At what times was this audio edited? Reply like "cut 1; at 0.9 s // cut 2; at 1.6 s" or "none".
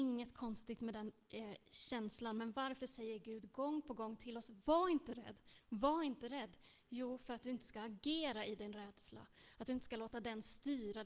none